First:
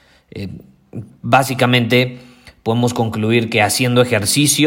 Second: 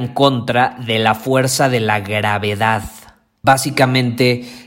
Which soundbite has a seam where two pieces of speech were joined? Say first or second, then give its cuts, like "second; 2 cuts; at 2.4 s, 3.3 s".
second; 1 cut; at 3.4 s